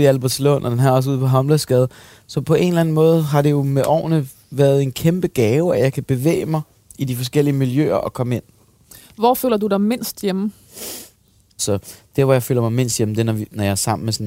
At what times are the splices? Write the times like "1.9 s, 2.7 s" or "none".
11.6 s

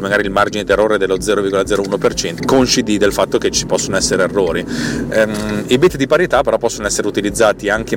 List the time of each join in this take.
2.4 s

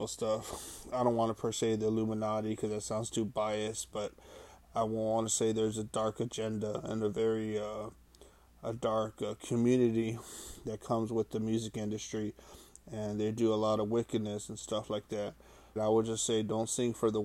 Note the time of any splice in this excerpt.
15.8 s

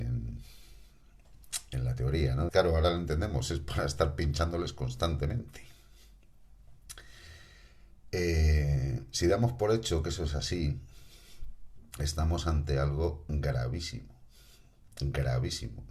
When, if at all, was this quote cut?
2.5 s

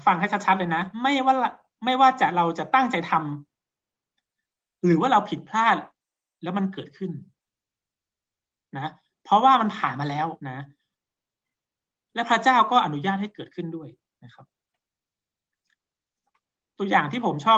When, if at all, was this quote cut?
0.9 s, 10.4 s

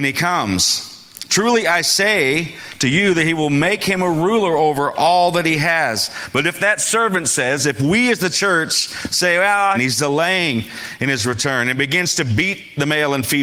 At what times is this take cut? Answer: 9.7 s

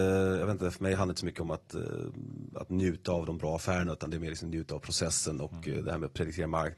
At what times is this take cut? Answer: none

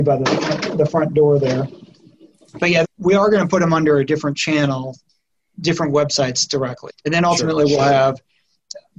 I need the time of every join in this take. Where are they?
2.8 s, 6.9 s

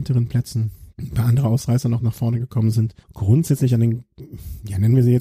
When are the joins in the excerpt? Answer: 0.9 s, 3.0 s

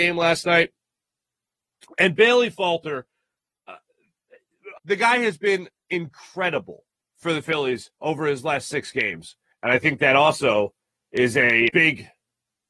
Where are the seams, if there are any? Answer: 4.8 s, 9.5 s, 11.7 s

